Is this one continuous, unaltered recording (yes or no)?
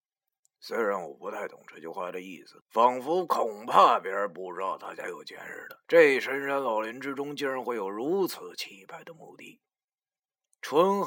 no